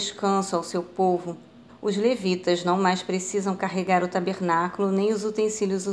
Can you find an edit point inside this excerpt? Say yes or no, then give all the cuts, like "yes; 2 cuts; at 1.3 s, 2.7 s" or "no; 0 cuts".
yes; 1 cut; at 1.7 s